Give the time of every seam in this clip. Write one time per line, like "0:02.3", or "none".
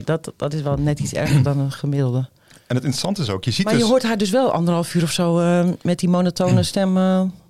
none